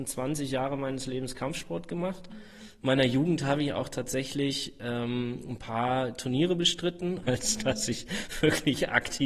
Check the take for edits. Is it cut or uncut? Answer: cut